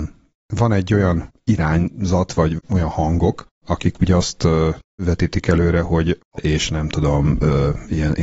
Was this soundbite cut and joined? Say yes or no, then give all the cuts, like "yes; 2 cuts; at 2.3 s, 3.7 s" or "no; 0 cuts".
yes; 2 cuts; at 3.5 s, 6.4 s